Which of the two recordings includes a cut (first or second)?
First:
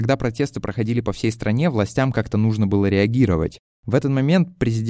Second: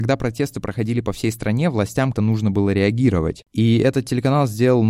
second